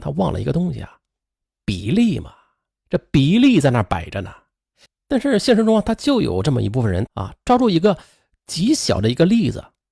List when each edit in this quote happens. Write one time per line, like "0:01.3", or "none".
0:04.9
0:07.1